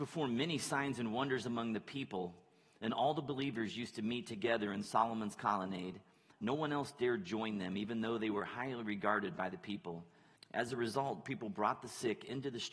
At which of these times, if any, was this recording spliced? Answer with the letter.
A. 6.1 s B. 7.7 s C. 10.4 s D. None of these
C